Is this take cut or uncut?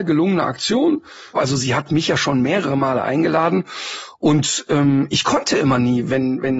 cut